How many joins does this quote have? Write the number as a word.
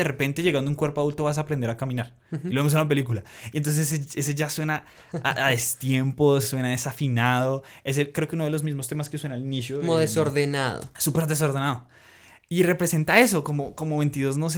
zero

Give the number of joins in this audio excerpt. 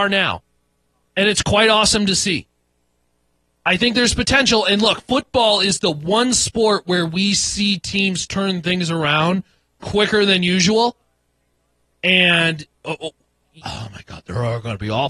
one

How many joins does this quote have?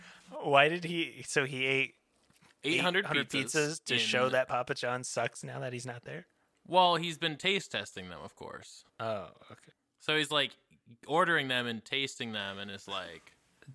one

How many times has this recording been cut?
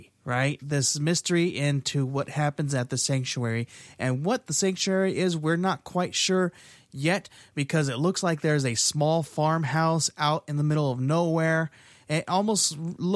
zero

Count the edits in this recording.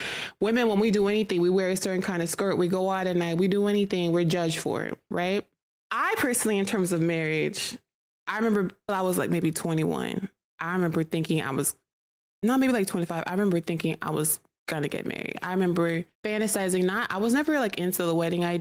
one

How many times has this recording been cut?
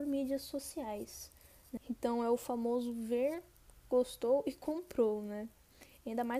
one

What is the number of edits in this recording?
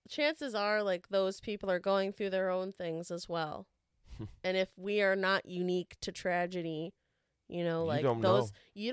zero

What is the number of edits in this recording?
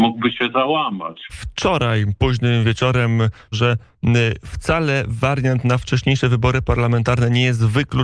two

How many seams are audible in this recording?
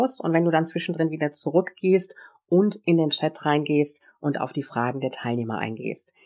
zero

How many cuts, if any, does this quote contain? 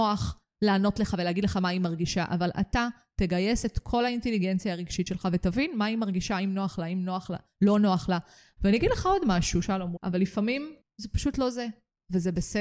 two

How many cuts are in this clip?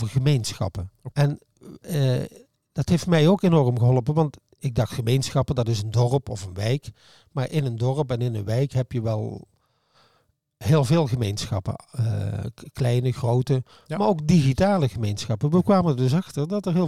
one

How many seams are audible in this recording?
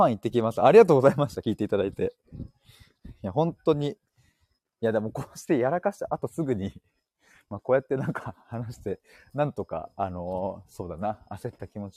zero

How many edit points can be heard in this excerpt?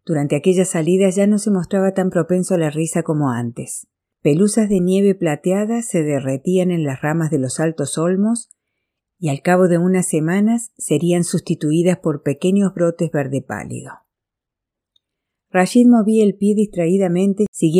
one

